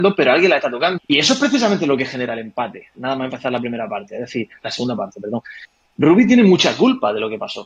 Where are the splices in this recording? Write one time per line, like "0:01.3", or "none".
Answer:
0:01.0